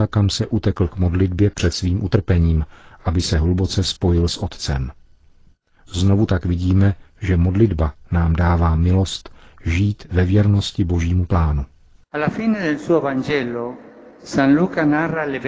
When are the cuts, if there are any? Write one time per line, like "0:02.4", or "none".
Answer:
none